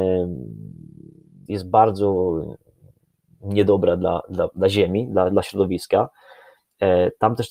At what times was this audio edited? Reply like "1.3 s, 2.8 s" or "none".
1.5 s